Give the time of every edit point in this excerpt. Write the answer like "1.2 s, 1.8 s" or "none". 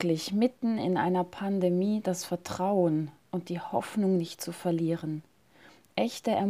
none